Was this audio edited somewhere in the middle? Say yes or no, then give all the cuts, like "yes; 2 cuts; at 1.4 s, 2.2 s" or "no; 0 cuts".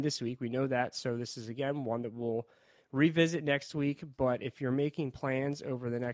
no; 0 cuts